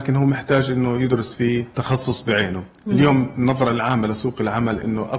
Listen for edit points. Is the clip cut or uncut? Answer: cut